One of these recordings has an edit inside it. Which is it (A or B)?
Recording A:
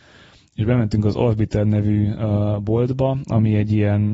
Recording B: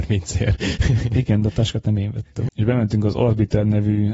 B